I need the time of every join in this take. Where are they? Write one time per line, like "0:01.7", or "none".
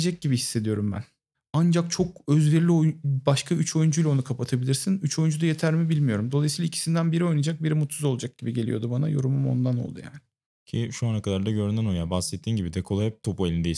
none